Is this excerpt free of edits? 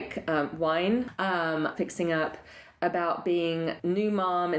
no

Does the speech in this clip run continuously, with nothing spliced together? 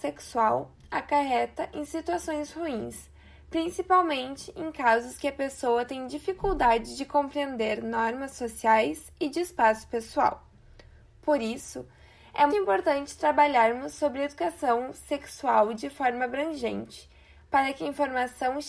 no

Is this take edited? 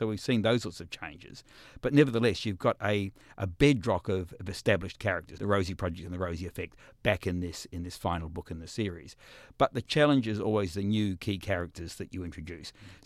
yes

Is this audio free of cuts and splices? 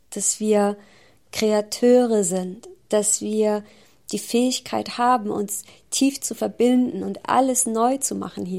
yes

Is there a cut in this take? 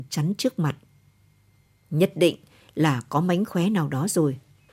no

